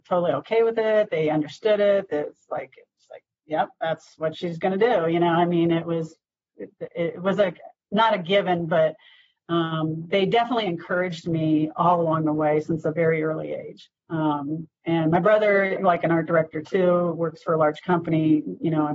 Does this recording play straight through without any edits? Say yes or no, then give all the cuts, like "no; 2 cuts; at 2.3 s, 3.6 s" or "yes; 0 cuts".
no; 2 cuts; at 14.0 s, 15.8 s